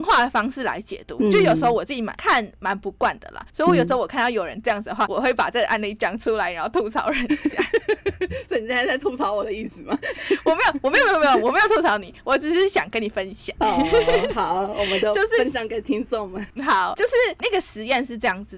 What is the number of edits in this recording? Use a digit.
0